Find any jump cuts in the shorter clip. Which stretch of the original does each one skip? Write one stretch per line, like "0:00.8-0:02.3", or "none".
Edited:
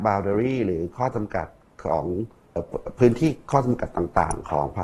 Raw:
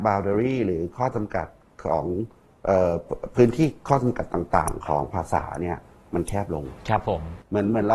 0:02.6-0:02.9